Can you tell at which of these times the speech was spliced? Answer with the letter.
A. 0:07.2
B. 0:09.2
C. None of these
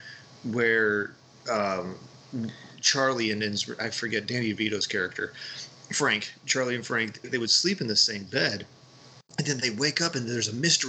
A